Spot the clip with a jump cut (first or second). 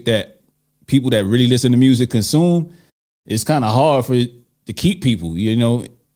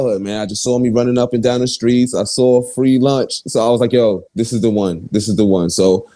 second